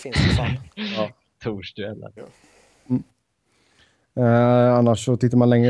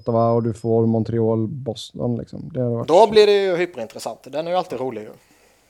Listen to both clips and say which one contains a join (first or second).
first